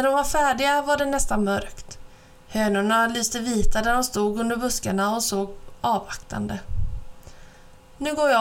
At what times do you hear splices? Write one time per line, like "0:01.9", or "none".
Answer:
none